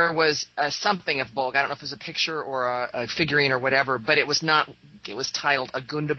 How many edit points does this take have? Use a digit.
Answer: 2